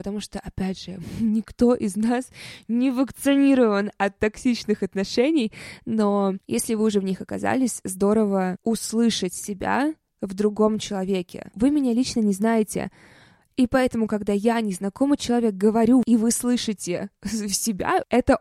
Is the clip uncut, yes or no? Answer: yes